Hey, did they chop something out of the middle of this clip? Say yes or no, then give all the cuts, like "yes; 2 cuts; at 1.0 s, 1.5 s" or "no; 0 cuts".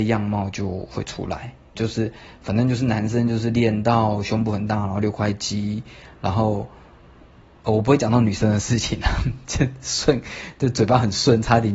yes; 1 cut; at 1.8 s